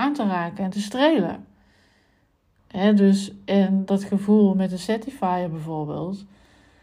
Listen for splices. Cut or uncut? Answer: cut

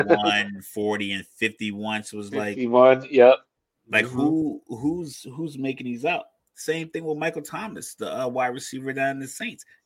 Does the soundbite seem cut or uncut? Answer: uncut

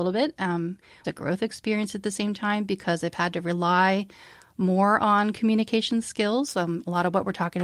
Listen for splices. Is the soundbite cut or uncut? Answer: cut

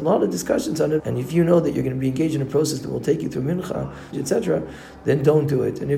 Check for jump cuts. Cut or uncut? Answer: cut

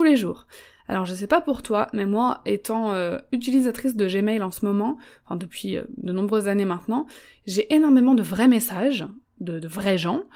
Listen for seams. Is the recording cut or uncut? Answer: uncut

